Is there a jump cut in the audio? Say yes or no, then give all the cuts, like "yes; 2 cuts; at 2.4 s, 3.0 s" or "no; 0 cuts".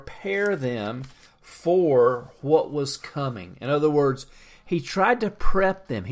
no; 0 cuts